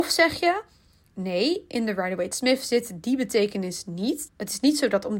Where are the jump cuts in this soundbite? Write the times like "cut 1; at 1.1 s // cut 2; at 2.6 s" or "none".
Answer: cut 1; at 4.3 s